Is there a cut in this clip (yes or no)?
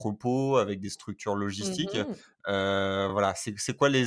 no